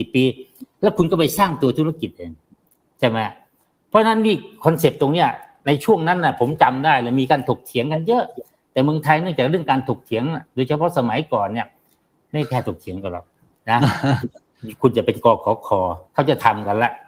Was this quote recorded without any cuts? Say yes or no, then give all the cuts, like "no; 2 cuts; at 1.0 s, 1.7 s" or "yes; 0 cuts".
no; 1 cut; at 16.1 s